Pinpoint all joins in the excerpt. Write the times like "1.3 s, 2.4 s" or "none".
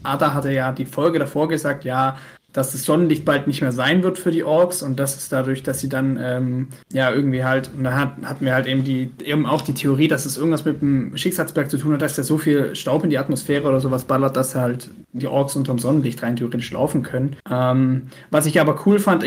6.8 s, 17.4 s